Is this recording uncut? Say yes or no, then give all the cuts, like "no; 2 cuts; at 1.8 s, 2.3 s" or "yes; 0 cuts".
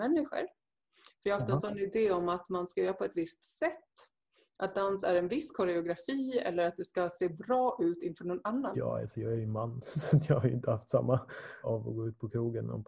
no; 2 cuts; at 8.7 s, 11.6 s